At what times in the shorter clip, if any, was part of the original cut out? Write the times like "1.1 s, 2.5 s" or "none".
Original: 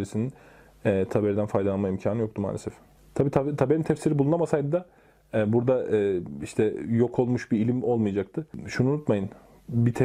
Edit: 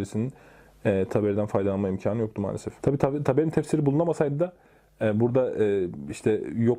2.8 s